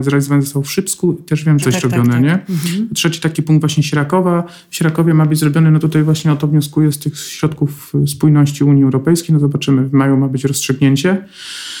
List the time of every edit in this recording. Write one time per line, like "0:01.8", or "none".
0:01.6